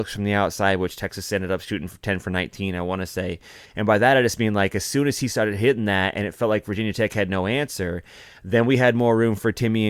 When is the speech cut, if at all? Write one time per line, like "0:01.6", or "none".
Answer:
0:03.6